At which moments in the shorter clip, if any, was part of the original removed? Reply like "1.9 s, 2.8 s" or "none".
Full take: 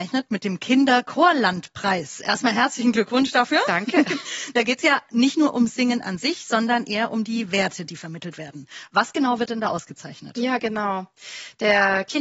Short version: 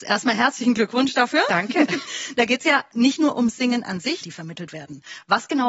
4.2 s